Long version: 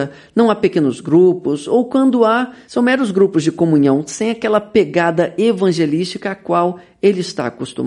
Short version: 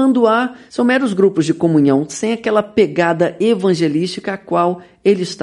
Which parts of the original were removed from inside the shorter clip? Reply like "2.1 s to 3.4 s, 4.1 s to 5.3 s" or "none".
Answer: none